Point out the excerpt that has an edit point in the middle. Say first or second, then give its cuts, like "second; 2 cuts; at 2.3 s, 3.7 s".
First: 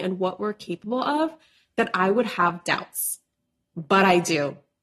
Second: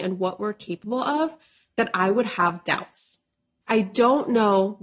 second; 1 cut; at 3.6 s